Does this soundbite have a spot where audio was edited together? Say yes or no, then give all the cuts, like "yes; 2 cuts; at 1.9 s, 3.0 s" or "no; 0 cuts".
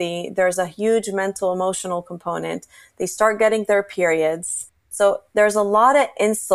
yes; 1 cut; at 4.8 s